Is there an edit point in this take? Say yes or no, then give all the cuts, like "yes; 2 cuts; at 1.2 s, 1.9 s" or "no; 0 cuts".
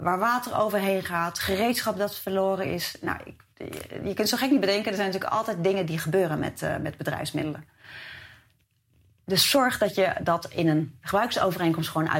no; 0 cuts